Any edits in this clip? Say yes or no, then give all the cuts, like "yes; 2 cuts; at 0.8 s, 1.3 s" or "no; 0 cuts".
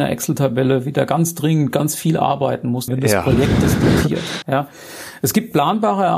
yes; 2 cuts; at 2.9 s, 4.4 s